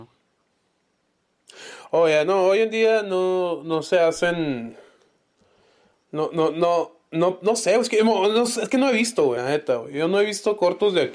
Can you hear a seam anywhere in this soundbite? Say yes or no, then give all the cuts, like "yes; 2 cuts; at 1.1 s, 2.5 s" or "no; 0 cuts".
no; 0 cuts